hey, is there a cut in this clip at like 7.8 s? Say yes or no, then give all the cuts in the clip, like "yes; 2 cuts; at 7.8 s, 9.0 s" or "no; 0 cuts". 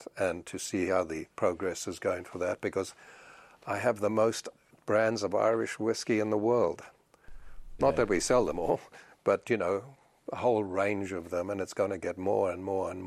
yes; 1 cut; at 7.8 s